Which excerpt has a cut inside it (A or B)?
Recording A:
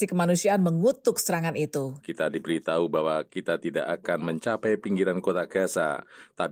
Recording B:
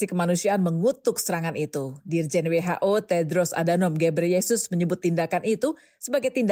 A